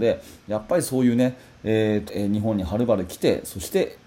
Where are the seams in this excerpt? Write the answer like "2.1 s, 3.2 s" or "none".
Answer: 2.1 s